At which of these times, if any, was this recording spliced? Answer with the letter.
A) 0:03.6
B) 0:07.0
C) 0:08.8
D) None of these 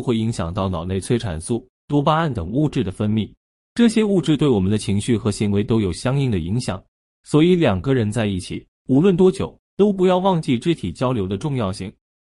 D